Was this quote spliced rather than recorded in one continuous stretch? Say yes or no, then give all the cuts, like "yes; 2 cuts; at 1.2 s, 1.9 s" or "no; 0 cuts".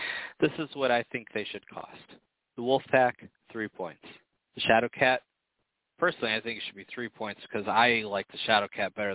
no; 0 cuts